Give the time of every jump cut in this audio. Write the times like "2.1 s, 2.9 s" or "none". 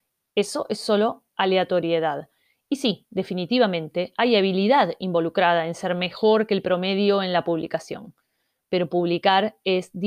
none